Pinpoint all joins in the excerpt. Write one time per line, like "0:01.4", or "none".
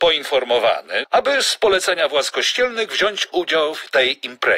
0:01.0